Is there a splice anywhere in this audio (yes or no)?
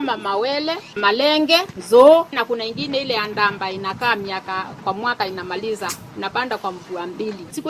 yes